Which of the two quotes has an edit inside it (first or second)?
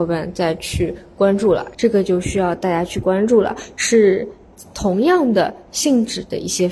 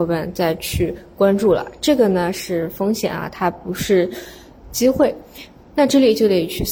first